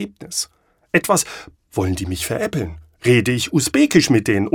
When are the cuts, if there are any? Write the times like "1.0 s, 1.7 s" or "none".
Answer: 1.5 s